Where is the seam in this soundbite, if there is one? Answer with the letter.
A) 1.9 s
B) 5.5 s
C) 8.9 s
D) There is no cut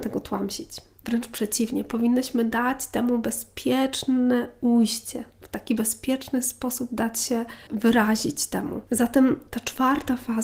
D